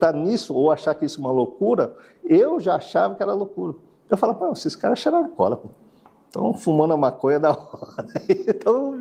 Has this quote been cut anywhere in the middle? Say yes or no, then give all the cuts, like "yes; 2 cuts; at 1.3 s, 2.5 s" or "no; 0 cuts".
no; 0 cuts